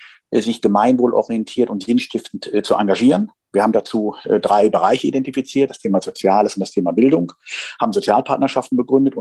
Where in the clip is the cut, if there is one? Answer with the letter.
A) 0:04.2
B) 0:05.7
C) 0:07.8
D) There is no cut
B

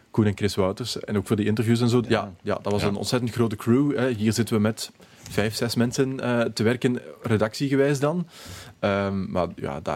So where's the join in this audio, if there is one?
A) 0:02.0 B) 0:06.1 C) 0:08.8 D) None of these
A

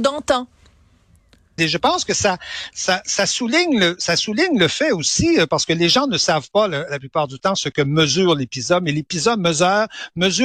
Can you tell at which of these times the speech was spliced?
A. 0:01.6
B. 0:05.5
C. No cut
A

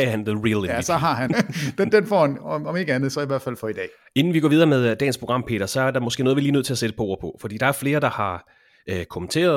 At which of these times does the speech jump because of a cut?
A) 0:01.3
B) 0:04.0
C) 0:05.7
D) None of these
A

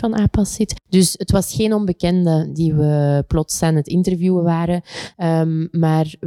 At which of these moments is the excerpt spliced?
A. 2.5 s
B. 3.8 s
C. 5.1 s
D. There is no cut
C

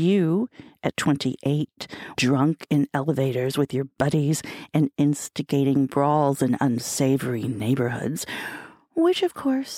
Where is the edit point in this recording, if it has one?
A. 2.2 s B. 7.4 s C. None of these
A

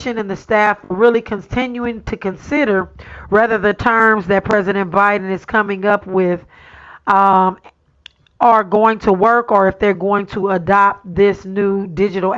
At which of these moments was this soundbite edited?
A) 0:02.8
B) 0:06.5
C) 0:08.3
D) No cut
D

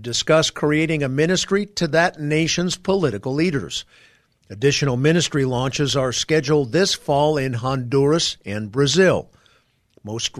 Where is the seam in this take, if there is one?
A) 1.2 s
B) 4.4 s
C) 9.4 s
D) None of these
B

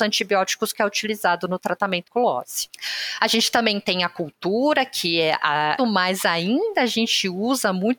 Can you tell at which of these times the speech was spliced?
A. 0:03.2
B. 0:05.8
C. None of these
B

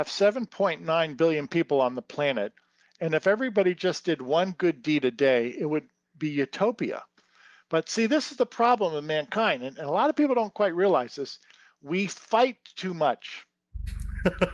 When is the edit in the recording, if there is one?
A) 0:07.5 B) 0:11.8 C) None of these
C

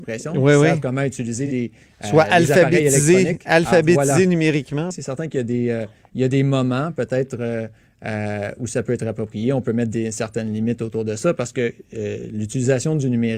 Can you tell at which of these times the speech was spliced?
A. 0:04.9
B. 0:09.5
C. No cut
A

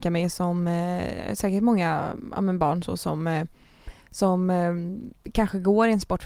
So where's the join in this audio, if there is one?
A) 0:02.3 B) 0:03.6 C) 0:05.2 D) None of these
C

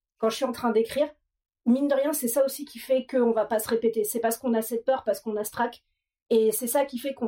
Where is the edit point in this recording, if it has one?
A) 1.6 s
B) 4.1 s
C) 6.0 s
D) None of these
D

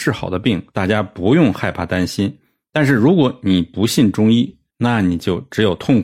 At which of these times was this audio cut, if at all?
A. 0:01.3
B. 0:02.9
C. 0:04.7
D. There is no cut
C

